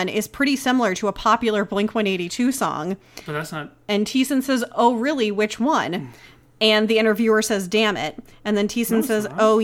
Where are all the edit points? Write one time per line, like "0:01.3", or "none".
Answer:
none